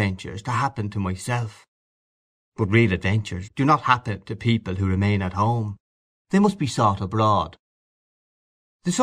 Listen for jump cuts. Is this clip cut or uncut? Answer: cut